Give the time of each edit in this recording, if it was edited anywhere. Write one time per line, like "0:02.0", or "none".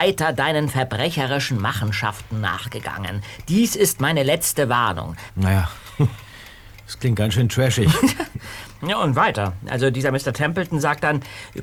0:05.3